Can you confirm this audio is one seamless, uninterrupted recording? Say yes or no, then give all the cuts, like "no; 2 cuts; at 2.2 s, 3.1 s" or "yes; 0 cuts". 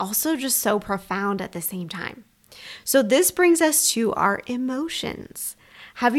yes; 0 cuts